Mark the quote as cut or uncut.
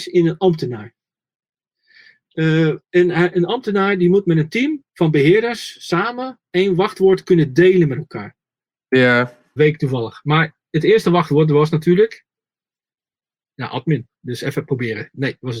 cut